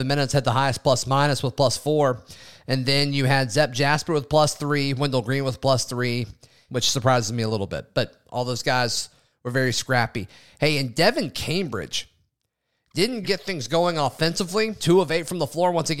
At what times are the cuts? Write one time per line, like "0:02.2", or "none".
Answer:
0:06.7
0:13.2
0:14.8